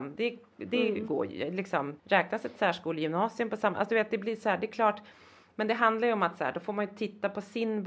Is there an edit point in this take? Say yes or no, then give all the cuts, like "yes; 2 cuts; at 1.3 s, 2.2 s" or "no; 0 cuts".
yes; 1 cut; at 2.0 s